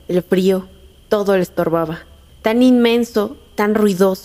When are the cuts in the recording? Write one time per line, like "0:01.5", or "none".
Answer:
0:02.3